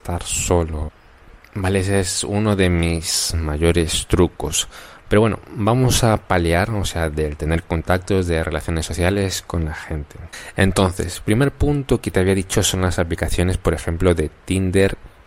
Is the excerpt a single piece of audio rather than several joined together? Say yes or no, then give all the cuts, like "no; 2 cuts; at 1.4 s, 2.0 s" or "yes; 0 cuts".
yes; 0 cuts